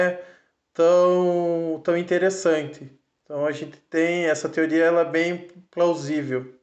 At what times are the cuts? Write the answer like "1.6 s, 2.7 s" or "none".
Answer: 3.1 s